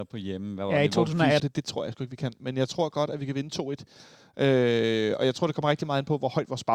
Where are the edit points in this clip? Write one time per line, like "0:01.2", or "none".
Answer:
0:01.4